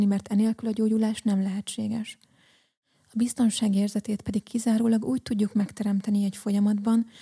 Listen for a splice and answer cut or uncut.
uncut